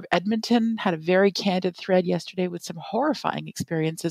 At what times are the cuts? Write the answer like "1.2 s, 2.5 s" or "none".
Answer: none